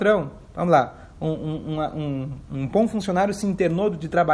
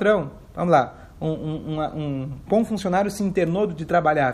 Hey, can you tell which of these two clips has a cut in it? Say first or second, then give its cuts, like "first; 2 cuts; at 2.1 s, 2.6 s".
second; 1 cut; at 2.5 s